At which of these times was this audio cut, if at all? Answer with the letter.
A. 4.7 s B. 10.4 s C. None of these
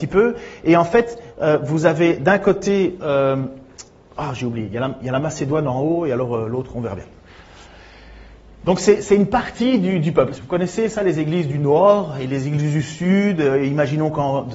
B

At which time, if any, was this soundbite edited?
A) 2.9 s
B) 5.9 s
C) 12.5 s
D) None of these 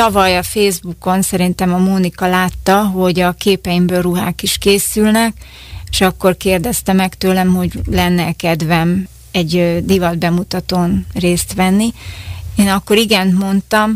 D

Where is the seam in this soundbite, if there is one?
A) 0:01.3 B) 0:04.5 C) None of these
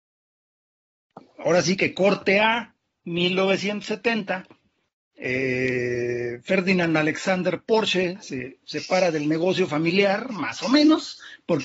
C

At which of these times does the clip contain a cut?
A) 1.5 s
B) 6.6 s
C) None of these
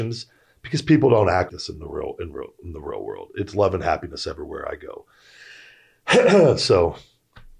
A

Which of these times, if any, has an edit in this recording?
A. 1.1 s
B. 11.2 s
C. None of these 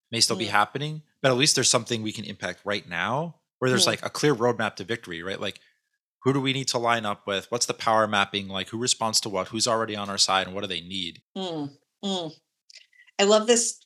B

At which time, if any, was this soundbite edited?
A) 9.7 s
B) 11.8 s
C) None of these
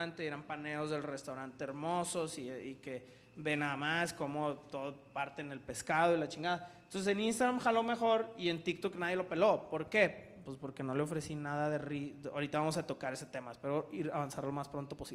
C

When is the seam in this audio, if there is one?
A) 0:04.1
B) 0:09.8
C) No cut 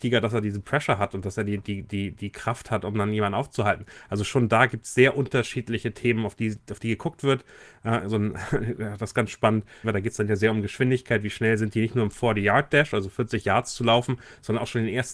B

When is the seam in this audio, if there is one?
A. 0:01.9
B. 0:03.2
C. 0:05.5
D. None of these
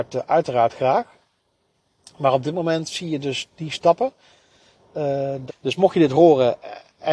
C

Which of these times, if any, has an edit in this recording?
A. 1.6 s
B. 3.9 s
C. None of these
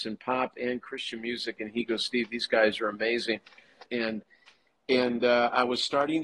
B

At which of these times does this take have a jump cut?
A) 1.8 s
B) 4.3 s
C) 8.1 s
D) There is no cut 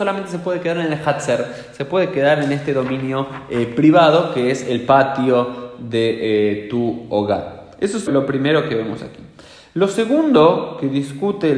C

